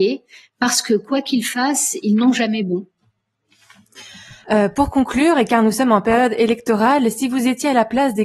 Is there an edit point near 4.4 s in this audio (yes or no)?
yes